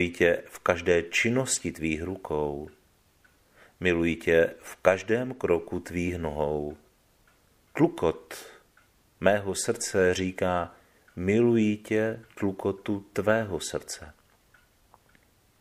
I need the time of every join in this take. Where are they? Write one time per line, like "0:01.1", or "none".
0:07.7

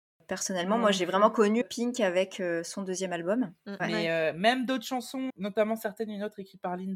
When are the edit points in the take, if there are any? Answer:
0:01.6
0:03.8
0:05.3

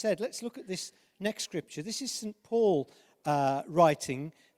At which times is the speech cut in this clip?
none

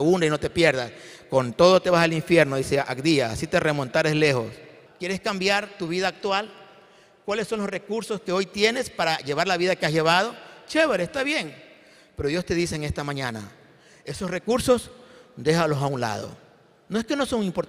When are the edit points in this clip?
0:04.9

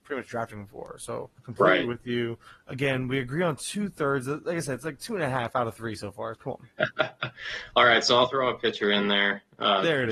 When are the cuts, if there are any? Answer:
0:01.4
0:06.3

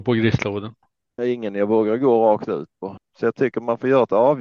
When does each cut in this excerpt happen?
0:01.2
0:03.0

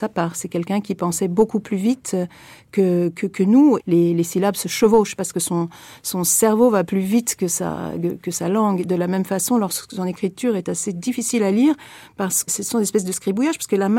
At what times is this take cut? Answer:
0:03.8
0:12.5

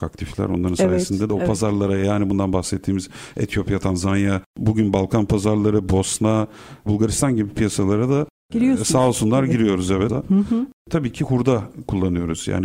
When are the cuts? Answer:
0:06.9
0:10.1

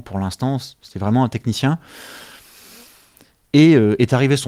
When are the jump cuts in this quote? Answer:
0:03.3

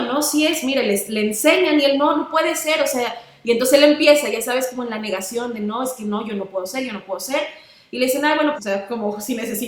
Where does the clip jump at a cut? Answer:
0:08.6

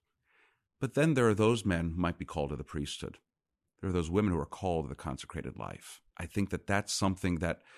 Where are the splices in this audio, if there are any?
0:06.1

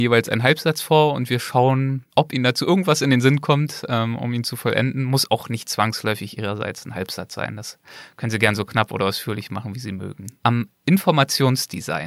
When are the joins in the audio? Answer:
0:10.4

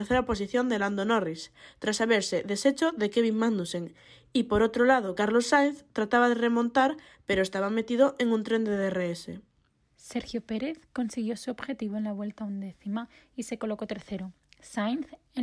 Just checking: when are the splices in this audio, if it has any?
none

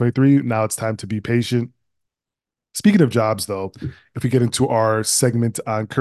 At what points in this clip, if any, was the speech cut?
none

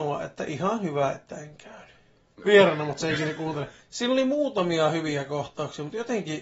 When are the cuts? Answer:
0:02.4
0:03.8

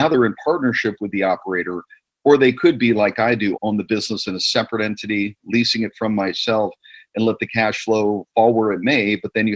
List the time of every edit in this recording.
0:03.5

